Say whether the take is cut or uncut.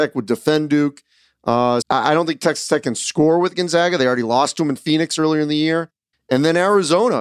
cut